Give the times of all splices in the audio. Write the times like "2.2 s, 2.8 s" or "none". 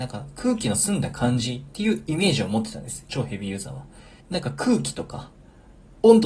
4.2 s